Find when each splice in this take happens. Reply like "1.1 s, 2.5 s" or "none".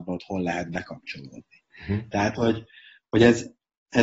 none